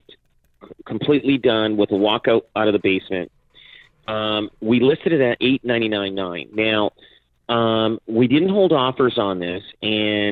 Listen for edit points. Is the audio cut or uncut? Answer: uncut